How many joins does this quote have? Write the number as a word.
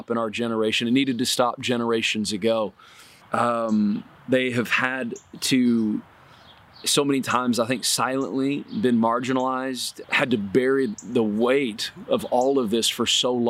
two